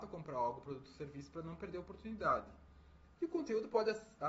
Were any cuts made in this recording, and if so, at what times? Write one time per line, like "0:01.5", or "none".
0:03.2